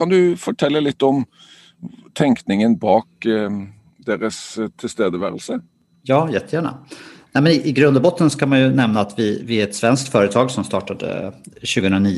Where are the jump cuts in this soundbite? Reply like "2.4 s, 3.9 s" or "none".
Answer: none